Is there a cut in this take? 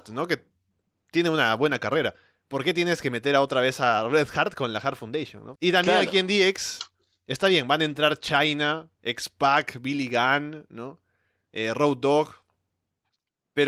yes; 1 cut; at 5.5 s

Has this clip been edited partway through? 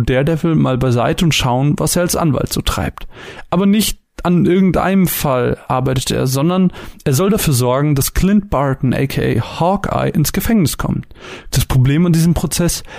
yes; 1 cut; at 11.5 s

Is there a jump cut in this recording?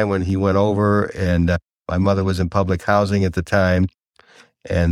no; 0 cuts

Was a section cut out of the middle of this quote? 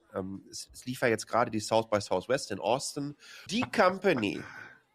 yes; 1 cut; at 3.5 s

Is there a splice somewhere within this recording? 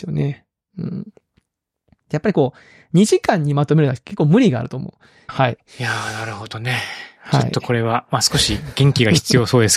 yes; 1 cut; at 5.3 s

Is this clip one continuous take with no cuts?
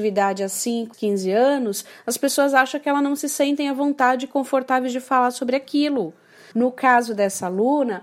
no; 2 cuts; at 0.9 s, 6.5 s

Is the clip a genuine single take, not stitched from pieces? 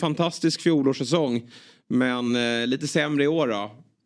yes; 0 cuts

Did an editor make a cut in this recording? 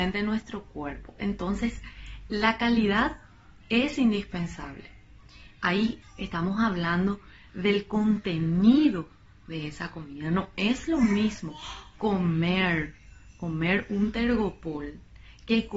yes; 1 cut; at 6.0 s

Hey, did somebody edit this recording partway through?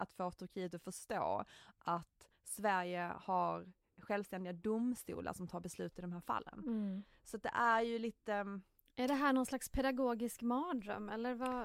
no; 0 cuts

